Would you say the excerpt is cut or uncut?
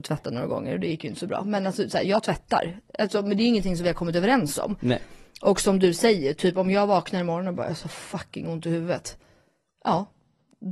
uncut